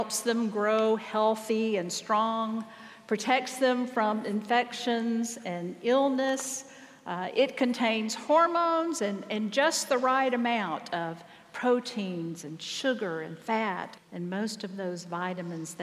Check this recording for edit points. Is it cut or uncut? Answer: cut